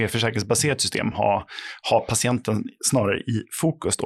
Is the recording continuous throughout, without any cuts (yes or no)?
yes